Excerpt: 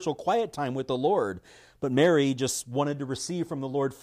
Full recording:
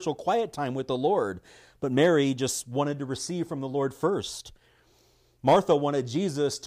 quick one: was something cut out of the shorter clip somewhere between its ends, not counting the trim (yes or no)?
no